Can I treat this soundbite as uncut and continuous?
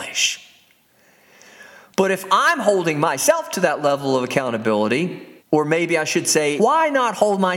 no; 2 cuts; at 5.4 s, 6.6 s

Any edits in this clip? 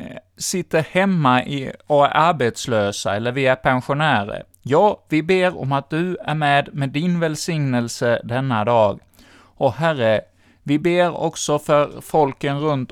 no; 0 cuts

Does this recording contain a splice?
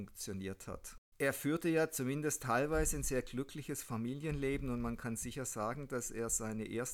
no; 0 cuts

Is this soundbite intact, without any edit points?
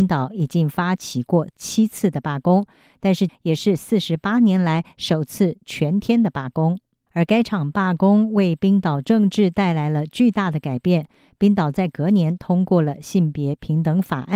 no; 2 cuts; at 3.3 s, 7.1 s

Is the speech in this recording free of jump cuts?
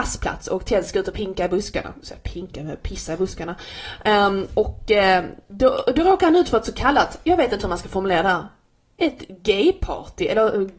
yes; 0 cuts

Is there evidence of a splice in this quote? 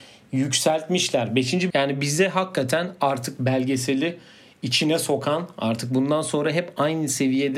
yes; 1 cut; at 1.7 s

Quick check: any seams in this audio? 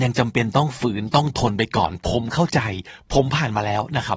no; 0 cuts

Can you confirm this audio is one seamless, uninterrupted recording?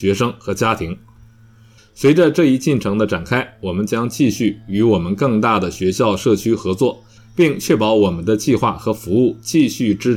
no; 2 cuts; at 1.8 s, 7.2 s

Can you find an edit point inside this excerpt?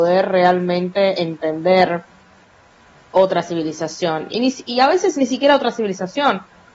no; 0 cuts

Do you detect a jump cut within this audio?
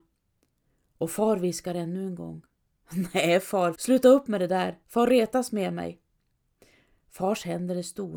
yes; 2 cuts; at 3.7 s, 4.8 s

